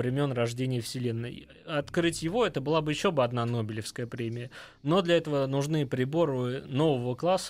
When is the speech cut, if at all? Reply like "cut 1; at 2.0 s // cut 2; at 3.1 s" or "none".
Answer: none